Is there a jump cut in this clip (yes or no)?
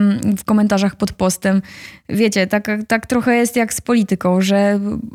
no